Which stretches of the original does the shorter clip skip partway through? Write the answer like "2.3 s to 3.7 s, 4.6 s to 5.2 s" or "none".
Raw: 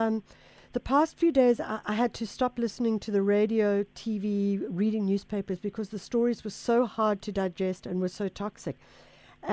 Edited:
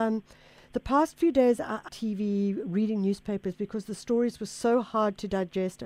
1.9 s to 3.9 s